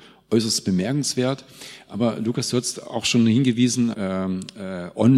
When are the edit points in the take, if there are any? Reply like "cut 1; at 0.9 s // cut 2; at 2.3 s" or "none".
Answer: cut 1; at 3.9 s